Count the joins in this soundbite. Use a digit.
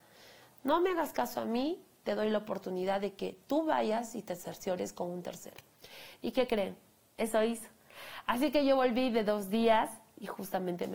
0